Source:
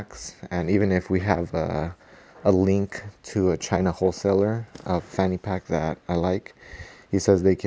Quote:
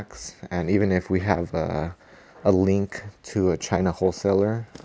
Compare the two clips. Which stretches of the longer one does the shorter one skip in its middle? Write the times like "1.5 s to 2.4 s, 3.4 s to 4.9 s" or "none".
none